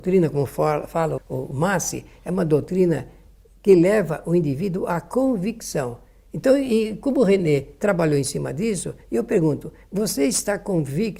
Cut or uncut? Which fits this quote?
cut